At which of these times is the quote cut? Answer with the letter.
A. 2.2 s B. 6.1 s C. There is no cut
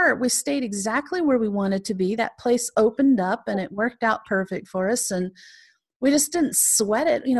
C